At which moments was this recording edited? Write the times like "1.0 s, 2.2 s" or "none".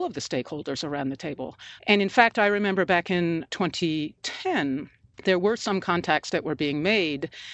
1.8 s